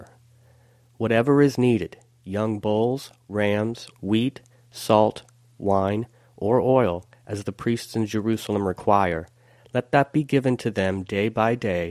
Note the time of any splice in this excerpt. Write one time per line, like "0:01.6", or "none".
0:03.9